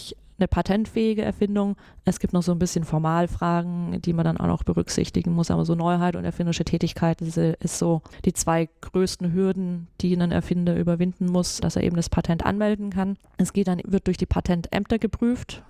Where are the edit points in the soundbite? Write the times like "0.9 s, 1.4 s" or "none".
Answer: 13.8 s